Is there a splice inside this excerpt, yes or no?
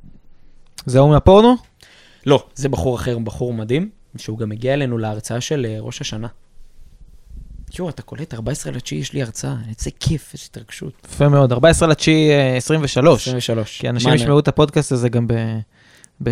no